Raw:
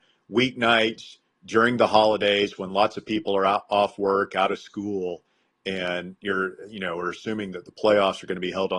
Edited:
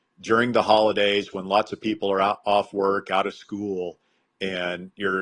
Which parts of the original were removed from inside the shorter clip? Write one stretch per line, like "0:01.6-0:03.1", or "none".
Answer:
none